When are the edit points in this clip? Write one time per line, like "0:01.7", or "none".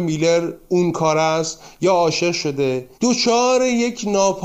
0:02.9